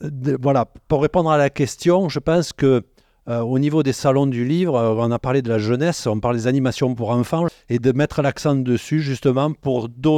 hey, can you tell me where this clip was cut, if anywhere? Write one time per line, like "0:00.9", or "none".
0:07.5